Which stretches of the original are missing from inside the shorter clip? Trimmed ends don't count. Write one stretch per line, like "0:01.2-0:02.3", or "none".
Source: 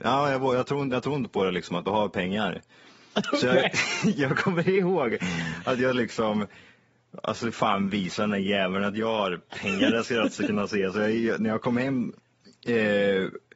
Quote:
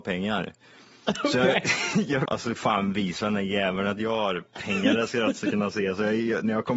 0:04.3-0:07.2